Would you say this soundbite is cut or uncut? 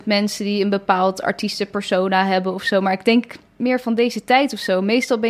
cut